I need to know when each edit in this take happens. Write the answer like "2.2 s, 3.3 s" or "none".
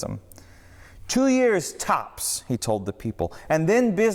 none